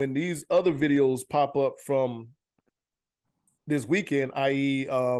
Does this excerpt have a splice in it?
no; 0 cuts

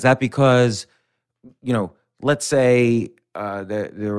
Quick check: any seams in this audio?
no; 0 cuts

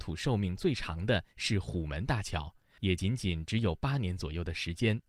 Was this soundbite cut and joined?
no; 0 cuts

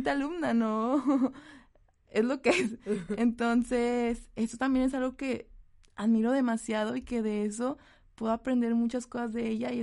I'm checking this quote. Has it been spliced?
no; 0 cuts

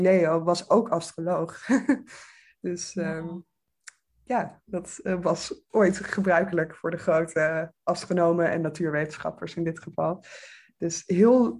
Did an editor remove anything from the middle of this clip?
no; 0 cuts

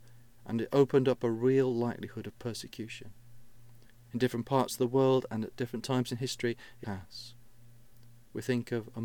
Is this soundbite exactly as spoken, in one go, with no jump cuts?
no; 1 cut; at 6.8 s

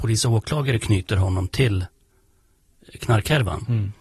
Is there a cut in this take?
no; 0 cuts

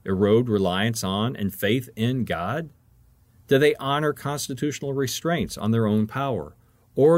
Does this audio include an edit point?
no; 0 cuts

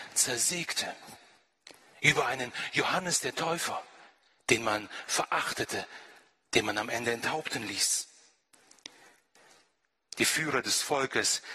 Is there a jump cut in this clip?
no; 0 cuts

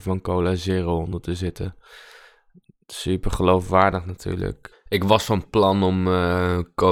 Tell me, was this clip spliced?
yes; 1 cut; at 4.7 s

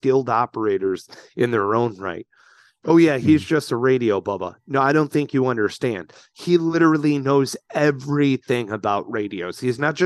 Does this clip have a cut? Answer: no; 0 cuts

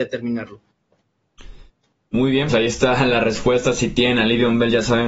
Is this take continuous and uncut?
no; 1 cut; at 2.5 s

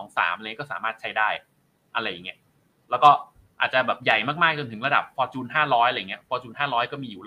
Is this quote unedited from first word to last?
yes; 0 cuts

